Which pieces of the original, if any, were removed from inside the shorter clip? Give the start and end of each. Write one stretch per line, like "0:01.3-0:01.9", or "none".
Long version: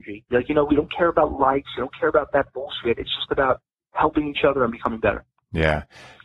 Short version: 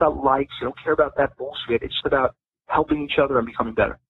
0:03.2-0:03.3